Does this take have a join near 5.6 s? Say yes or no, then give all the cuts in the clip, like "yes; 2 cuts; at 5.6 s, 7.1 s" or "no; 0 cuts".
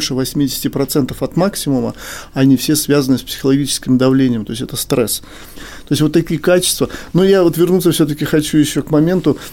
yes; 1 cut; at 5.6 s